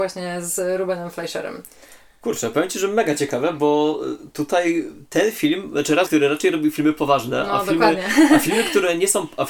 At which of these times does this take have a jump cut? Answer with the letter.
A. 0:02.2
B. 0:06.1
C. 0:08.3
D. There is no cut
B